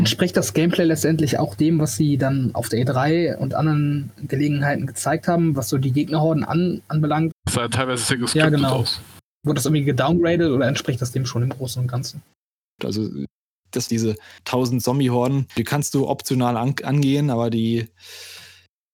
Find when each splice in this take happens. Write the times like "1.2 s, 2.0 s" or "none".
7.3 s, 12.8 s, 13.9 s